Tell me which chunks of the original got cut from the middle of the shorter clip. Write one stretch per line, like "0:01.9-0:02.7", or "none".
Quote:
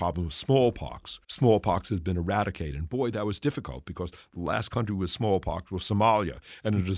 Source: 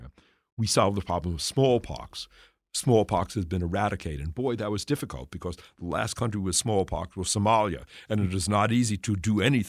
0:02.3-0:02.7